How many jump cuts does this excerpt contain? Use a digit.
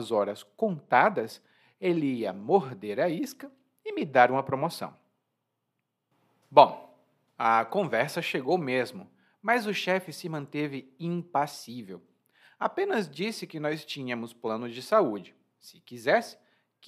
0